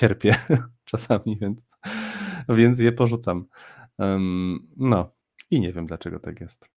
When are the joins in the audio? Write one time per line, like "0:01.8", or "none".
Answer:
none

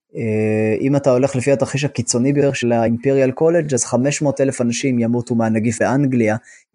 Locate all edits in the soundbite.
none

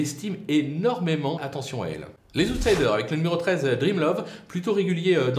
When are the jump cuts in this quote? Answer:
0:01.4

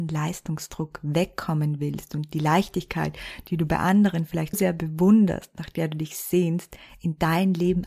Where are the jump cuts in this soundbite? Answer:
0:04.5

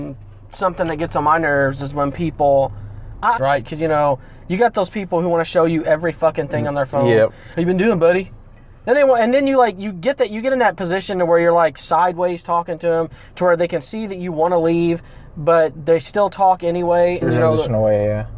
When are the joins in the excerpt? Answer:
0:03.4
0:07.5
0:17.2

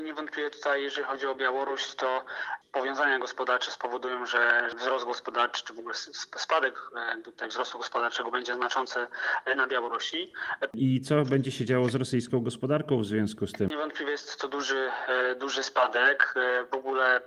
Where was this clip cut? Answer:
0:10.7

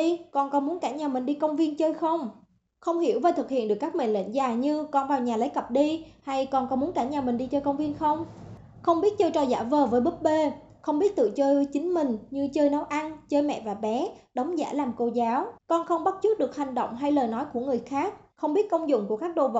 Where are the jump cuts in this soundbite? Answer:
0:15.6
0:18.3

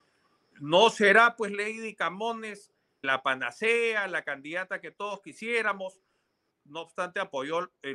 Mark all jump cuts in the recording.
0:03.0
0:06.5

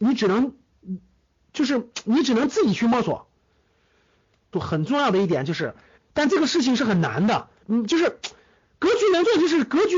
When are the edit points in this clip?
0:04.5
0:06.0
0:07.6

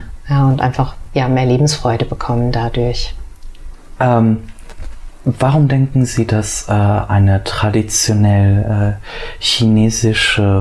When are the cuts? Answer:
0:04.0

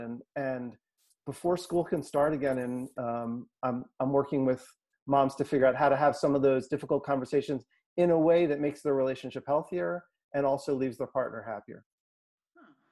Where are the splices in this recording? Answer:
0:02.9

